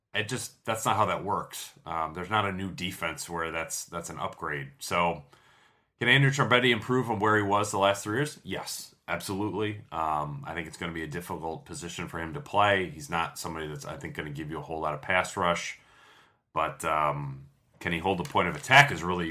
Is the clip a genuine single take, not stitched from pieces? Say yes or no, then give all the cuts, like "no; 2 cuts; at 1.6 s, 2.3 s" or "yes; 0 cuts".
yes; 0 cuts